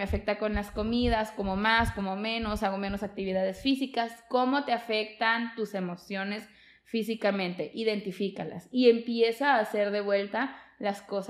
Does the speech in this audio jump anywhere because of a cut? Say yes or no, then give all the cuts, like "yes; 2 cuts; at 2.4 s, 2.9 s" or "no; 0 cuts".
no; 0 cuts